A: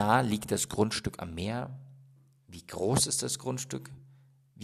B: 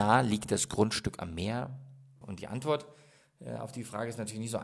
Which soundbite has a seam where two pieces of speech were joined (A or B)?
B